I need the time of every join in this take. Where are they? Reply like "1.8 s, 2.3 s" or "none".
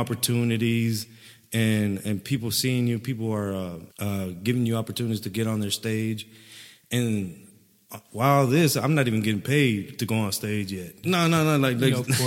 3.9 s, 11.0 s